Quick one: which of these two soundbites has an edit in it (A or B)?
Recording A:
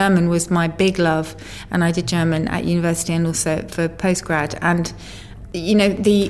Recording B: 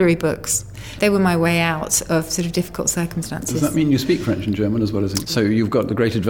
B